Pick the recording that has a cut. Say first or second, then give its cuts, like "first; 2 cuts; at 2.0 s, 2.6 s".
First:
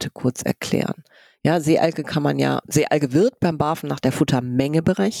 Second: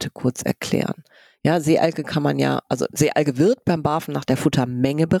first; 1 cut; at 2.6 s